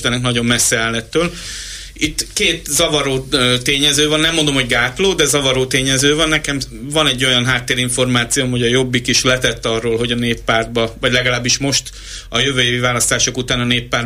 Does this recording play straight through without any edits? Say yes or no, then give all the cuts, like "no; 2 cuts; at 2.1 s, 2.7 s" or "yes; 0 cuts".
yes; 0 cuts